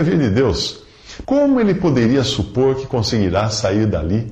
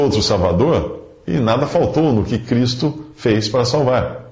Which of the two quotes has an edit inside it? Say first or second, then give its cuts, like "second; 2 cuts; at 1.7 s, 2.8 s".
first; 1 cut; at 1.2 s